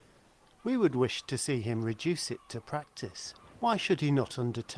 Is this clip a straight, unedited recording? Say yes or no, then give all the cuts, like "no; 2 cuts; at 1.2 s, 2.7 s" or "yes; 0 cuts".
no; 1 cut; at 3.5 s